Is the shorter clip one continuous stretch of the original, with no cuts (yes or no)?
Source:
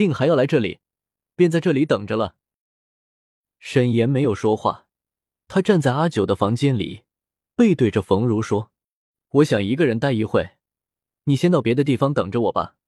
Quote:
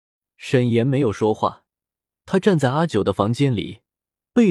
yes